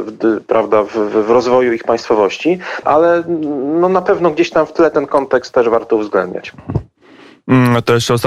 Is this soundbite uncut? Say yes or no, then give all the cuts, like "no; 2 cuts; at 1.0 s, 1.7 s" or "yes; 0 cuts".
no; 1 cut; at 2.8 s